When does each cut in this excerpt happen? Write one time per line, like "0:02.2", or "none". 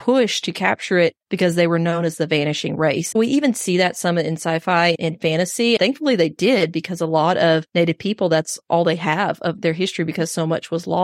0:03.1
0:05.8